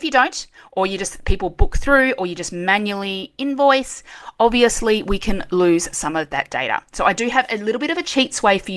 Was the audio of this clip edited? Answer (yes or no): no